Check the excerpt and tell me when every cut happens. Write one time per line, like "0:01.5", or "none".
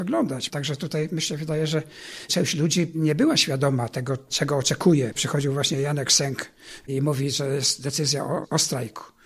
0:05.1